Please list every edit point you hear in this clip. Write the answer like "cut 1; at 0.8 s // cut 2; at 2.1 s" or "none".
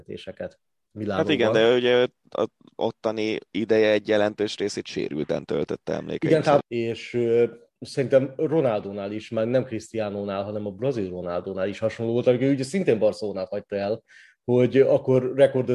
cut 1; at 6.6 s

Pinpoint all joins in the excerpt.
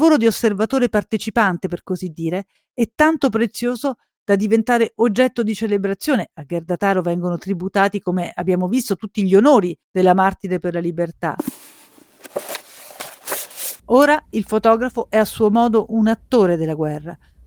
cut 1; at 13.8 s

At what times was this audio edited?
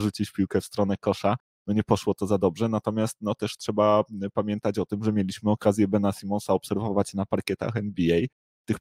none

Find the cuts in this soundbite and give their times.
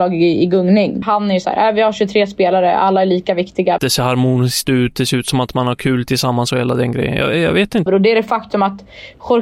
cut 1; at 1.0 s // cut 2; at 3.8 s // cut 3; at 7.9 s

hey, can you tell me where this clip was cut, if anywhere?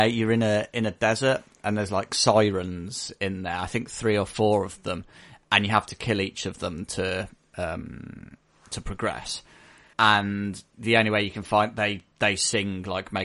cut 1; at 9.9 s

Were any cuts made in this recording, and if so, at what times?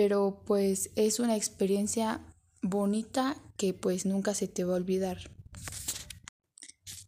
none

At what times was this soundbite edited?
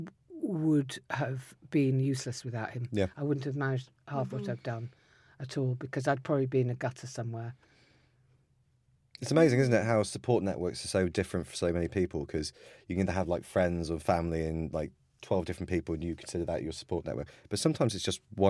none

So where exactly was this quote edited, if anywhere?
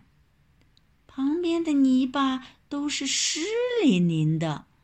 none

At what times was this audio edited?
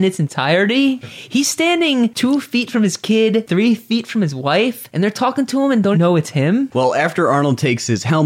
cut 1; at 5.9 s

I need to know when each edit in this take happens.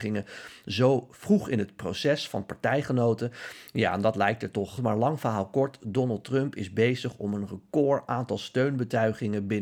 cut 1; at 4.8 s

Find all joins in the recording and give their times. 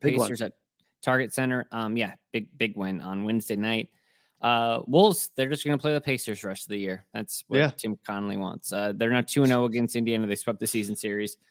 none

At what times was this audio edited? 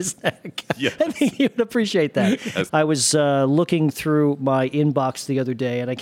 cut 1; at 2.7 s

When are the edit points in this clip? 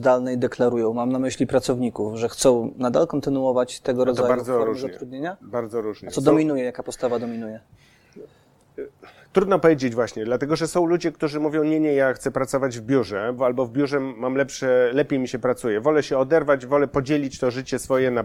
cut 1; at 13.4 s

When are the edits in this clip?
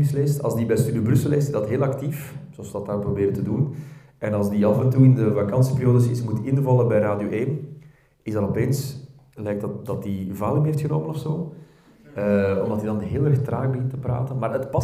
none

